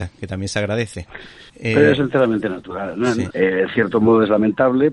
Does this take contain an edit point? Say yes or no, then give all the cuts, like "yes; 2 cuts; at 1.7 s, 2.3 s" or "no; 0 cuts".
yes; 2 cuts; at 1.5 s, 3.3 s